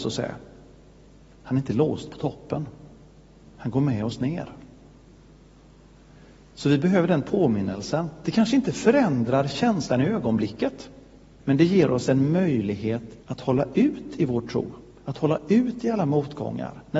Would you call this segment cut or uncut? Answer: cut